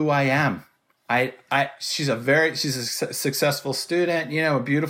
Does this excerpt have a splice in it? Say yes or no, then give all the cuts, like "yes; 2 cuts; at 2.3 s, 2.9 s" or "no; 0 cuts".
no; 0 cuts